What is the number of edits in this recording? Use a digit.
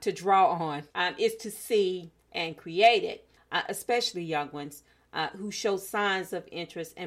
2